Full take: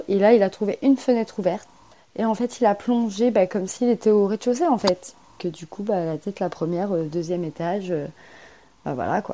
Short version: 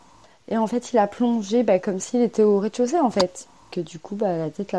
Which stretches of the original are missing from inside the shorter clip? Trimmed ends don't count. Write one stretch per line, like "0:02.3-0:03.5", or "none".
none